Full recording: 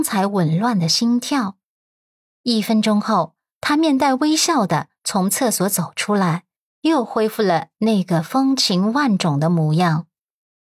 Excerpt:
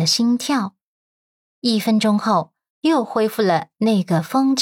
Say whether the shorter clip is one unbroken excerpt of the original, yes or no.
no